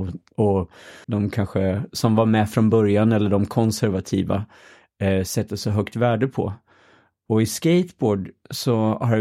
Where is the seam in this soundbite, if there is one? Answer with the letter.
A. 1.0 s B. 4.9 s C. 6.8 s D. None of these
A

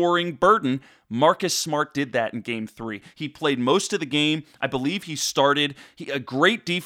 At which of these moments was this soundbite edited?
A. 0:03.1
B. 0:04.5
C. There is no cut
A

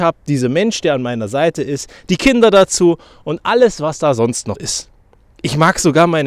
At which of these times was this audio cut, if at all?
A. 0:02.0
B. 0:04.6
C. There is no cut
B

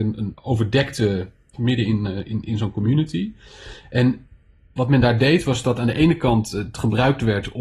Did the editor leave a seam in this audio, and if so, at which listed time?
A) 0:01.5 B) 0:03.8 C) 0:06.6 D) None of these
A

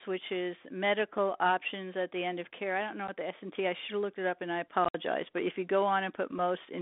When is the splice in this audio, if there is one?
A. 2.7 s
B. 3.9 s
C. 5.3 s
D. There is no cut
D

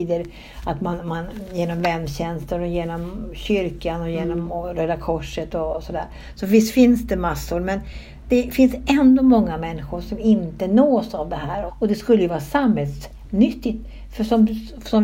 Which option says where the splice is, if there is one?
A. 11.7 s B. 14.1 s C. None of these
A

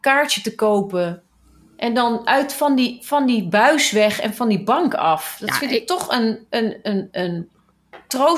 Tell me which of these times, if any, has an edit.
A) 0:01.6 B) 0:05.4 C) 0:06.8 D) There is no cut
D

